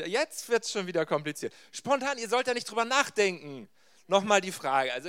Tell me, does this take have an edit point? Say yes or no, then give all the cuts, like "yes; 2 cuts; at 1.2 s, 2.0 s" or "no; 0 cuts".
no; 0 cuts